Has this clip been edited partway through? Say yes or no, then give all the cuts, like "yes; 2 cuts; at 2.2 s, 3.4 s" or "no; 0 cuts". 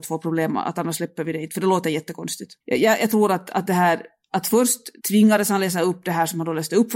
yes; 2 cuts; at 2.6 s, 5.0 s